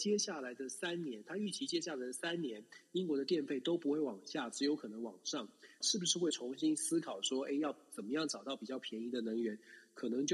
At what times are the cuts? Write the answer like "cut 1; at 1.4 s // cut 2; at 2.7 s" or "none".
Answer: cut 1; at 5.8 s